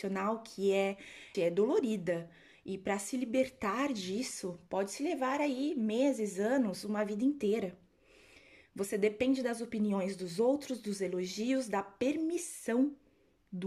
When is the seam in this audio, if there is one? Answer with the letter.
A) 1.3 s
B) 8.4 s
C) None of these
A